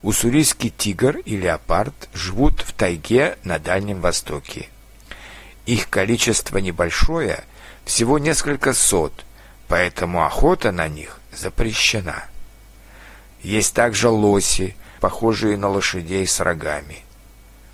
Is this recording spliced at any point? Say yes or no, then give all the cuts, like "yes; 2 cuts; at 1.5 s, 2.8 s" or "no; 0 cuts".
yes; 2 cuts; at 13.3 s, 15.0 s